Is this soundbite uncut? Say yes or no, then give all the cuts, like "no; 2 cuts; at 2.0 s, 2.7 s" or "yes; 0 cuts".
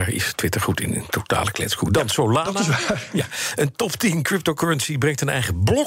yes; 0 cuts